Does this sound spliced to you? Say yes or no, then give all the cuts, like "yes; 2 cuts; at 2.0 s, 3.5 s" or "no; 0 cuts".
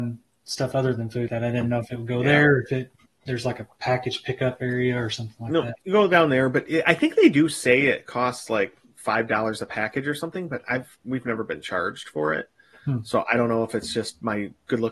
yes; 1 cut; at 1.3 s